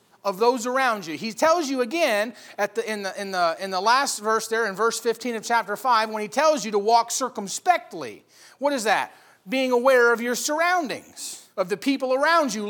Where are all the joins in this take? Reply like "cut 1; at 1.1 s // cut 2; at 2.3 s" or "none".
cut 1; at 11.5 s